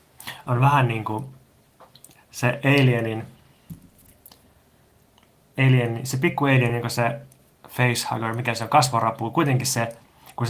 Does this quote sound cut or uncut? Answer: uncut